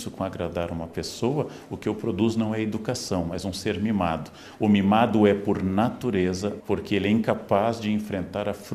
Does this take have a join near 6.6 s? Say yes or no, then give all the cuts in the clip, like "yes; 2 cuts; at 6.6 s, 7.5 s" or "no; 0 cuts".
yes; 2 cuts; at 4.6 s, 6.6 s